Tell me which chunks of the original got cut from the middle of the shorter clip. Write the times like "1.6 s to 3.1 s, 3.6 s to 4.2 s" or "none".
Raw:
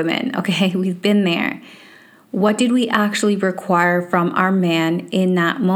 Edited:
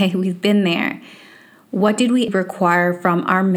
2.9 s to 3.4 s